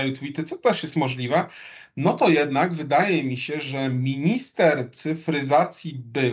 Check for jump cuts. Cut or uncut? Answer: uncut